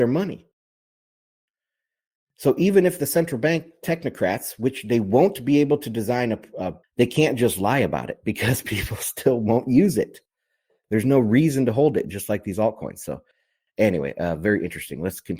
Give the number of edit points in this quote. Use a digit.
1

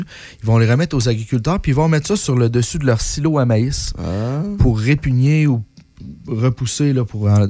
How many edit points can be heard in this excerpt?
0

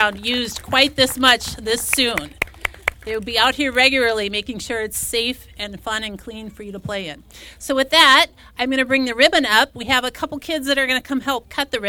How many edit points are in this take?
0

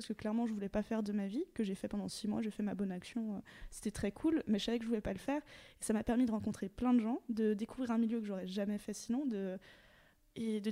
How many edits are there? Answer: 0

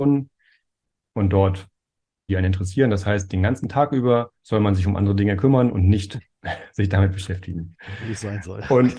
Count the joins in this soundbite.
2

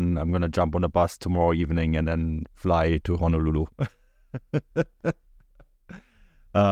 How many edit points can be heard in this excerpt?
0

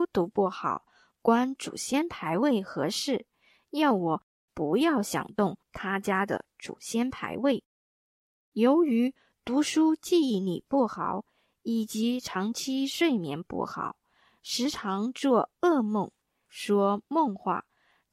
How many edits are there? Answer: 0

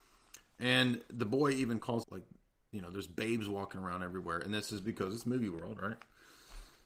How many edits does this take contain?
1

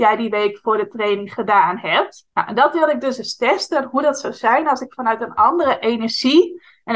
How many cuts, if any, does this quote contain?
1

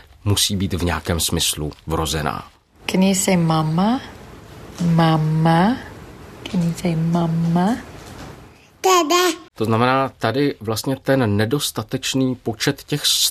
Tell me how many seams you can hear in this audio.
1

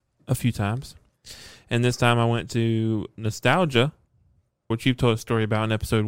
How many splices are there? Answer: 1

